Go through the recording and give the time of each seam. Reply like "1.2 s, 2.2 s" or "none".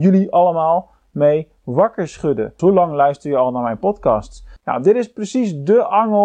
2.6 s, 4.6 s